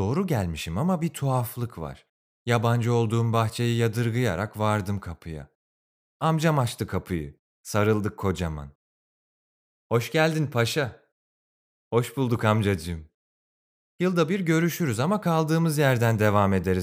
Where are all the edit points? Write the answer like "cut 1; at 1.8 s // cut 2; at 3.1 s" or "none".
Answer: cut 1; at 2.3 s